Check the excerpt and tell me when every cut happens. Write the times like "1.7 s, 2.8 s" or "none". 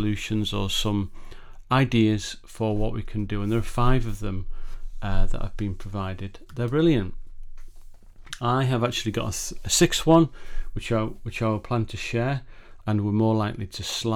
12.8 s